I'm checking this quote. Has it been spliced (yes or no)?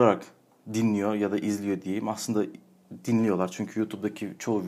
no